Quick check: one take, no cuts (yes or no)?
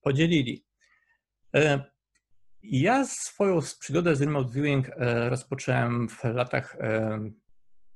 yes